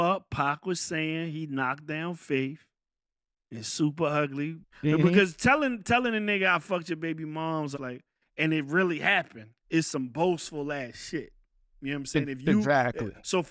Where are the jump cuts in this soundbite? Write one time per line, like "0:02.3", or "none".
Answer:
0:04.6
0:07.7
0:09.6